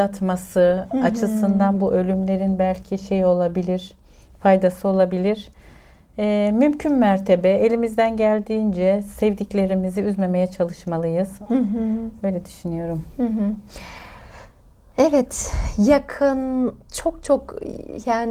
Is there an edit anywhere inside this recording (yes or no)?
no